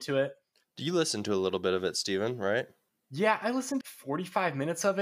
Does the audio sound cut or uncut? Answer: cut